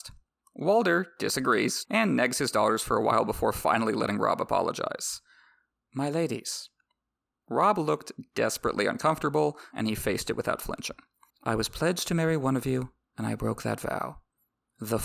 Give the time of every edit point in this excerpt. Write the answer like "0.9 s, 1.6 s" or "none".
1.8 s, 9.7 s, 11.3 s